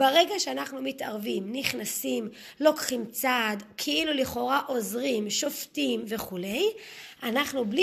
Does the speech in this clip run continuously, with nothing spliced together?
yes; 0 cuts

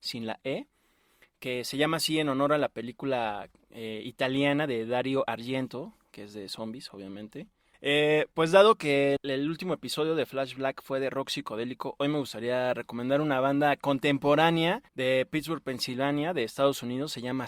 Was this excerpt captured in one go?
no; 3 cuts; at 7.7 s, 9.2 s, 14.9 s

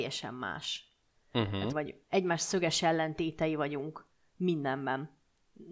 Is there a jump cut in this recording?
yes; 1 cut; at 1.7 s

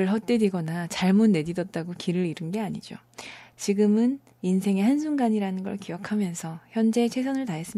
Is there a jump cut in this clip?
yes; 1 cut; at 3.5 s

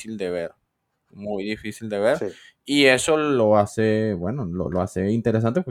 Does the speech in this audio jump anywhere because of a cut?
no; 0 cuts

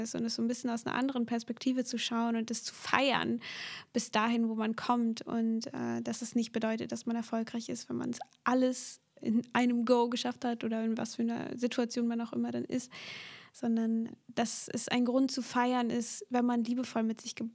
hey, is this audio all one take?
yes; 0 cuts

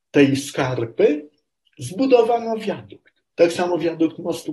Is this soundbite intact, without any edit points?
no; 1 cut; at 3.3 s

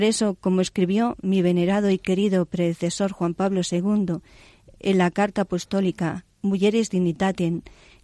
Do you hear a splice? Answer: no; 0 cuts

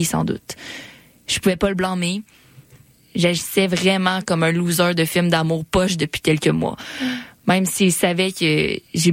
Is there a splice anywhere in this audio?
no; 0 cuts

